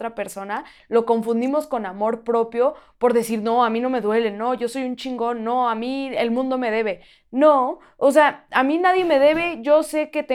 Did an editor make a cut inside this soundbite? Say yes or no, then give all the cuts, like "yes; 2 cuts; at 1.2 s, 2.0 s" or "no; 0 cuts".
no; 0 cuts